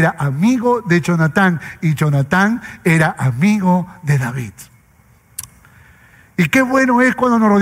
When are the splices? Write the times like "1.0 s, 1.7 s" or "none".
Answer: none